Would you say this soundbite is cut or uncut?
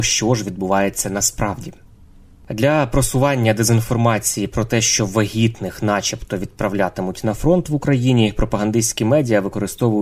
uncut